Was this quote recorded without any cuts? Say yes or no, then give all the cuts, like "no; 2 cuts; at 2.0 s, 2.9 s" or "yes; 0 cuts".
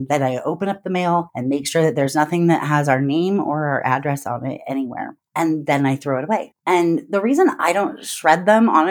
yes; 0 cuts